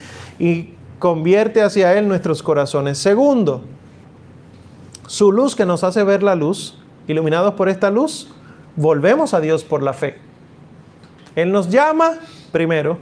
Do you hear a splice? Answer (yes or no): no